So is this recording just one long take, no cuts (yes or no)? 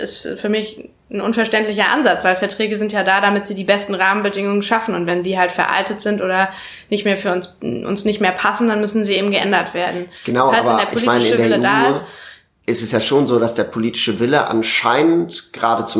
yes